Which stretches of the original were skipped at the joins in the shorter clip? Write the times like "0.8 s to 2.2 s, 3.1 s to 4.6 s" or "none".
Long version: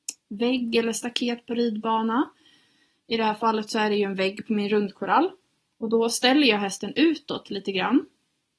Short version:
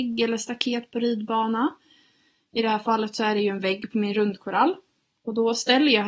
none